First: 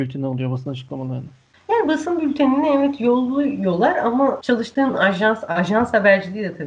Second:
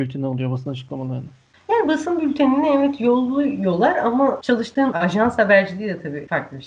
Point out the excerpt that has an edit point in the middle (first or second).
second